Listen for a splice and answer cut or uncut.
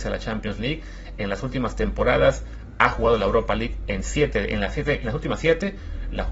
uncut